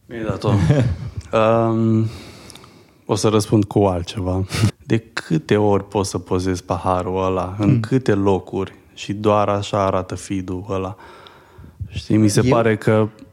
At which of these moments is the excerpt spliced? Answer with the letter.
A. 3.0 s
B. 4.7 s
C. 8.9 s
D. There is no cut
B